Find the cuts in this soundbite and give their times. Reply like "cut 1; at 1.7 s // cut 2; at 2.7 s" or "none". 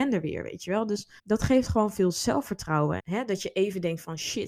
cut 1; at 1.2 s // cut 2; at 3.0 s